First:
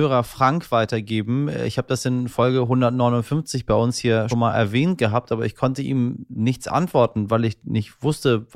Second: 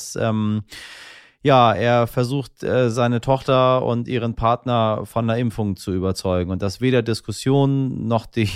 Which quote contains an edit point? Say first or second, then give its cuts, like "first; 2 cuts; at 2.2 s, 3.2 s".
first; 1 cut; at 4.3 s